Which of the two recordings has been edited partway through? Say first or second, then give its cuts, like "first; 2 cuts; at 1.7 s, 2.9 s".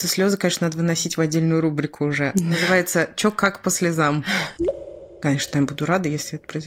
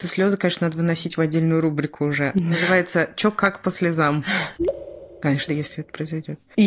second; 1 cut; at 5.5 s